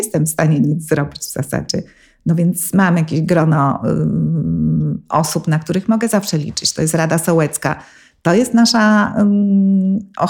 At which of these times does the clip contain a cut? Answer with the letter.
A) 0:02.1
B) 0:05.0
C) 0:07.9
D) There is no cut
D